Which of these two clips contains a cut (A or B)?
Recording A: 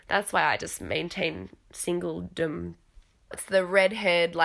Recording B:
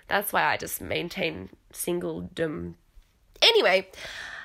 A